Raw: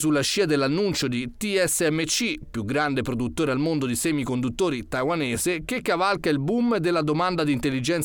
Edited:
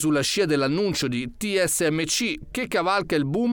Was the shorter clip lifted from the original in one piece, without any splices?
no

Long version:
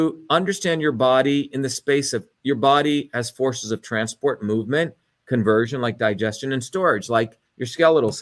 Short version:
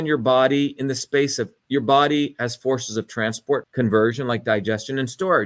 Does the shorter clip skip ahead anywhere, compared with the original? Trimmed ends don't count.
yes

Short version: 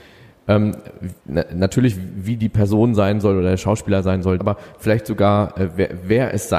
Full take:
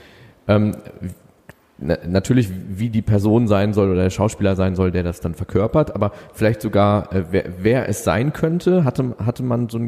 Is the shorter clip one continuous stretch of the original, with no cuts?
no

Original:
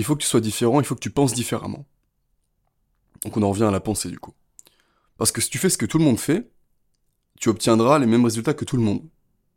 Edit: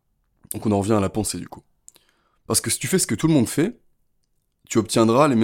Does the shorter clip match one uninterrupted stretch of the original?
yes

